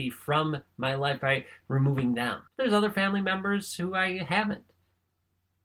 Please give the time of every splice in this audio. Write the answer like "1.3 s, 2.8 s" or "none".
2.5 s